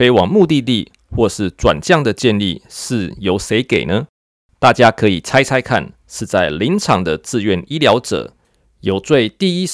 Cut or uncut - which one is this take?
cut